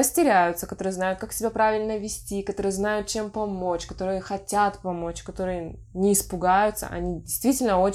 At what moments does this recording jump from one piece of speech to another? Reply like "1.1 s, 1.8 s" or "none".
none

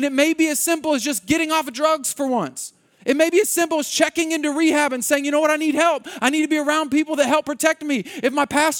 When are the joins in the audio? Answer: none

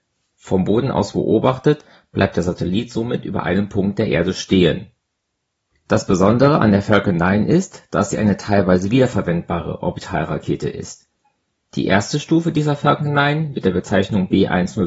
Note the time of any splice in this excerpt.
none

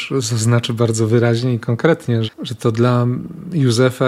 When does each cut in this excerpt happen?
2.3 s

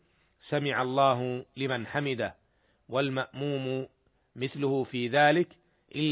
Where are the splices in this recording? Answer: none

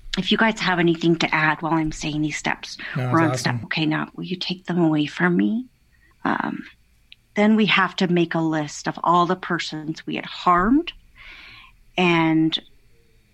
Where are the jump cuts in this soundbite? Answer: 3.6 s, 6.1 s

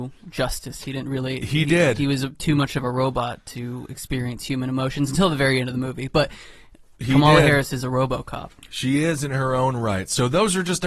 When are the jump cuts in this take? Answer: none

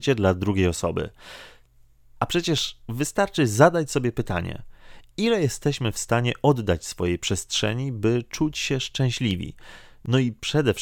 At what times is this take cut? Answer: 2.0 s

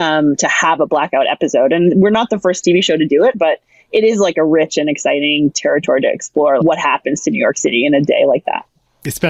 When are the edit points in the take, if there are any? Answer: 3.3 s, 6.6 s

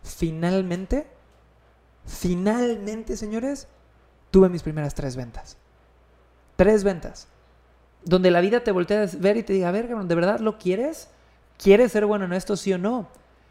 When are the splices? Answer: 7.9 s

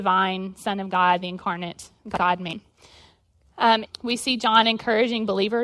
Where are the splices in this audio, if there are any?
2.0 s, 3.9 s

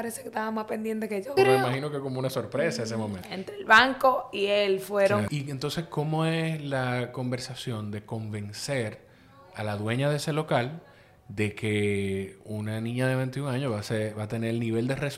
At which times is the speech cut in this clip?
1.4 s, 3.2 s, 5.3 s

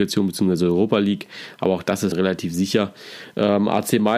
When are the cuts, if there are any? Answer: 2.1 s

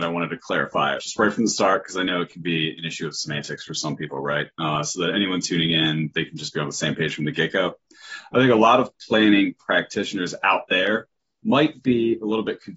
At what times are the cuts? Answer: 1.0 s

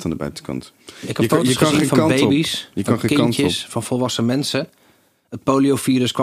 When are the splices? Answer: none

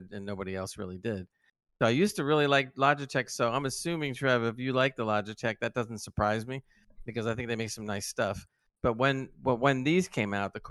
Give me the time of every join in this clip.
none

